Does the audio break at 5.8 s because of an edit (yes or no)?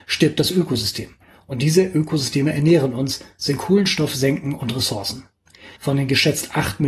yes